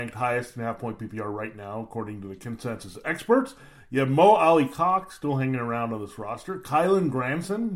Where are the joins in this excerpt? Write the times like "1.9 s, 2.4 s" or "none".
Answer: none